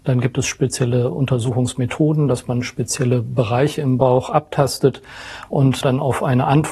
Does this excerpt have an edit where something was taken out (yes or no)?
yes